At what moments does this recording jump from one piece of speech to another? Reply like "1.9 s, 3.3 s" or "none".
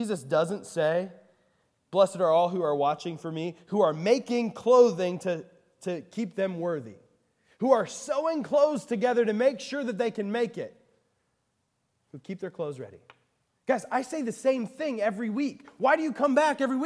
13.5 s